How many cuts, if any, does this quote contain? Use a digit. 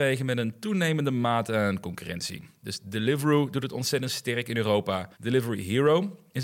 1